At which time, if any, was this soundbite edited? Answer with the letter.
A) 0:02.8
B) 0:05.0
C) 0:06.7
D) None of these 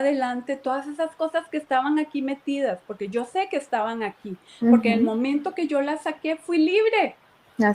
D